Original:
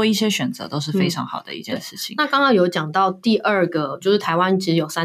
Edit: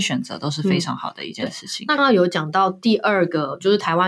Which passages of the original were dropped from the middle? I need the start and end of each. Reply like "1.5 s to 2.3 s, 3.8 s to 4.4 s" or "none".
2.3 s to 2.4 s